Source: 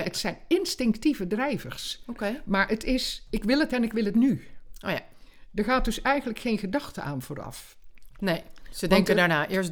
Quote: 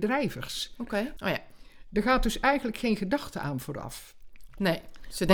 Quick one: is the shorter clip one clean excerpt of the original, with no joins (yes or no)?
no